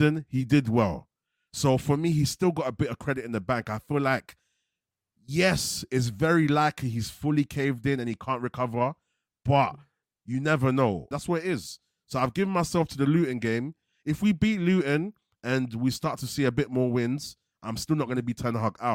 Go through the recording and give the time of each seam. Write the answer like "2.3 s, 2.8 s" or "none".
11.1 s